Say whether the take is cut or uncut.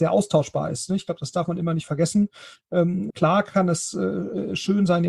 cut